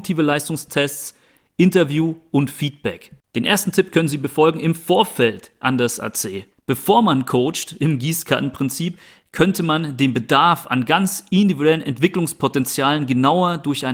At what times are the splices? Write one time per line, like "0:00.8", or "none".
0:06.5